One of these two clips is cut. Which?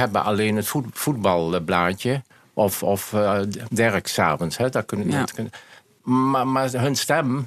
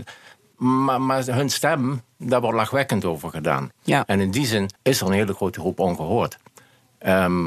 second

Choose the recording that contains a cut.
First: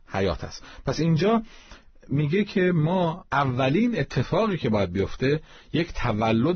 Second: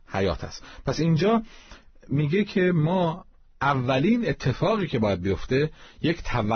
first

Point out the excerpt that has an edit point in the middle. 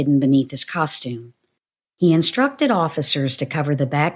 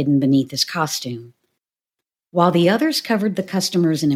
first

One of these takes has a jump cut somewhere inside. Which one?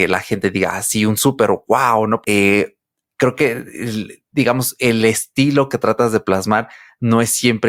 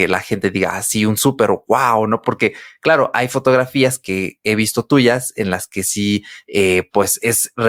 first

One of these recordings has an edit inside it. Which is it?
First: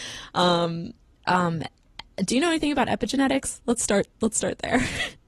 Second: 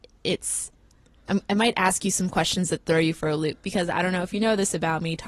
first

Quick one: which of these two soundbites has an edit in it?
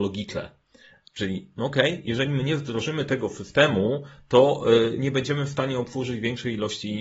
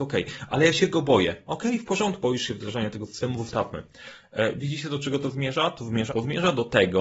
second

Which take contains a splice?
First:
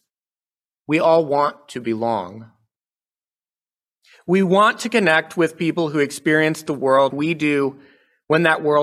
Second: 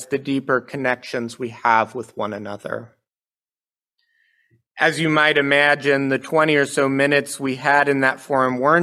first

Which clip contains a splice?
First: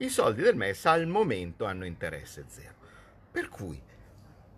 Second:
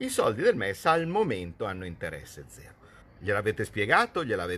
second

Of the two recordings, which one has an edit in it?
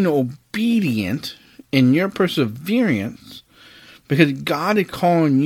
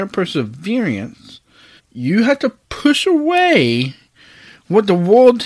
second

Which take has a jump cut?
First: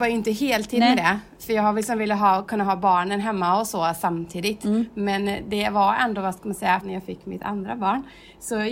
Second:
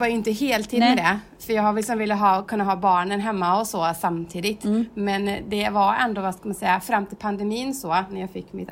first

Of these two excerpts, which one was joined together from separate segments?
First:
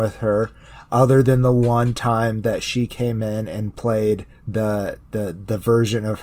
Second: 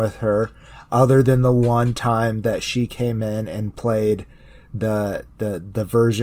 first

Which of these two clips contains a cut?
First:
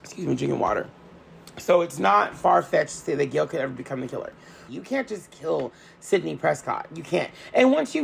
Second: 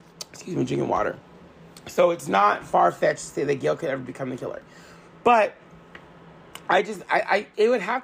first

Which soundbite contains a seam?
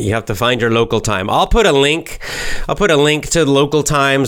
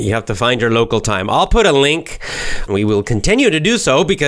second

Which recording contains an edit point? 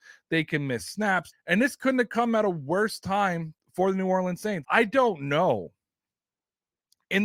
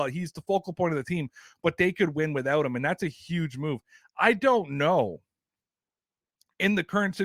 first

